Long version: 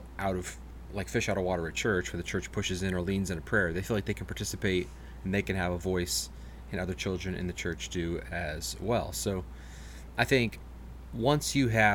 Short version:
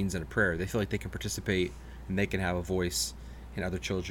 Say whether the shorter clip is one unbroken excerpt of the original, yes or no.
yes